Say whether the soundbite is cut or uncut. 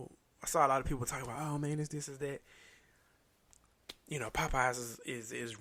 uncut